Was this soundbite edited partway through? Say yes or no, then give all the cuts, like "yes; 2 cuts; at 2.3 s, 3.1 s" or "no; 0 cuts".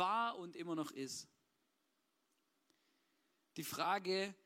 no; 0 cuts